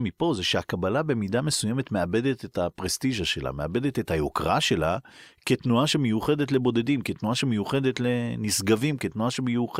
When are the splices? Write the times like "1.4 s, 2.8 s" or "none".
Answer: none